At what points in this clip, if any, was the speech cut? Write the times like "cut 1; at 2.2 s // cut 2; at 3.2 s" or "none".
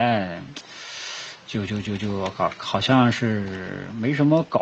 none